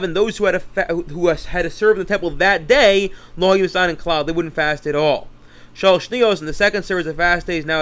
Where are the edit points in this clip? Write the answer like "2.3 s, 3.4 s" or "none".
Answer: none